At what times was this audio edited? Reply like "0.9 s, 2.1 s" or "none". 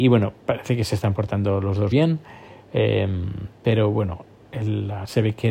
1.9 s